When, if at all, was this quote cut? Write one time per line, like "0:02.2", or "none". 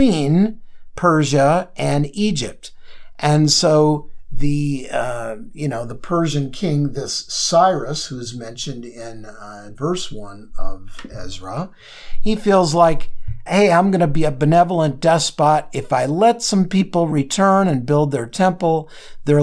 0:09.7
0:13.5

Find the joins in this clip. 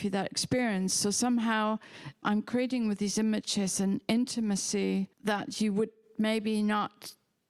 0:05.1

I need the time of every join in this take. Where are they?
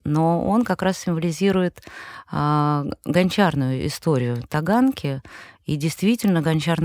none

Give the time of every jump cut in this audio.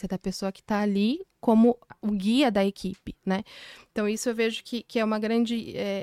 0:01.9

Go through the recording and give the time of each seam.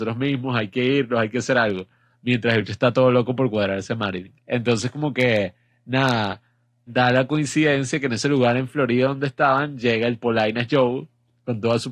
0:04.4
0:06.9
0:10.2

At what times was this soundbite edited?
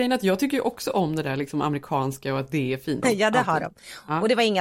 0:03.0

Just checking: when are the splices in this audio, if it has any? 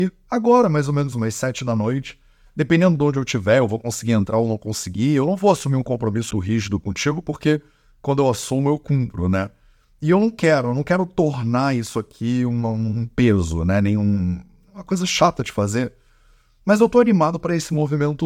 0:06.3

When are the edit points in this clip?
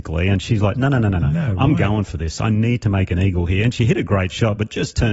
none

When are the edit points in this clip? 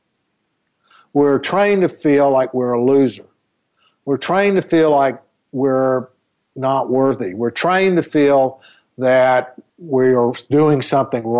0:09.7

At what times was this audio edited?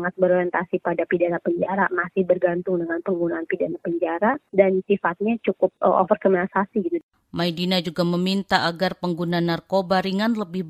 none

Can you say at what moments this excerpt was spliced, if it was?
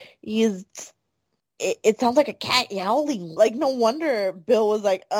0:03.4

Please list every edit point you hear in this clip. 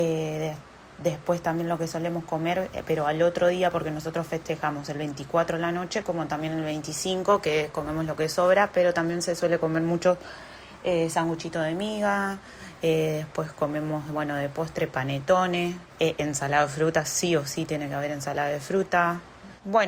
none

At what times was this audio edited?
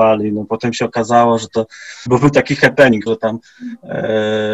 0:02.1
0:03.1

